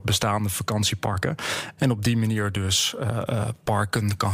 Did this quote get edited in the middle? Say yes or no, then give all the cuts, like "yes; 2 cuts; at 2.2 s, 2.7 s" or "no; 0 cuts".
yes; 1 cut; at 1.8 s